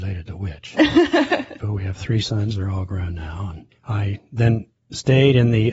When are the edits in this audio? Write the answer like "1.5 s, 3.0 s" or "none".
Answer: none